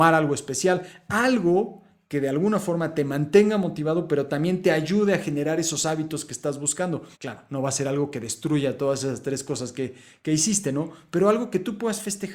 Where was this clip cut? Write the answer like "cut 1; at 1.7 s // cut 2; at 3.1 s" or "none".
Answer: cut 1; at 7.1 s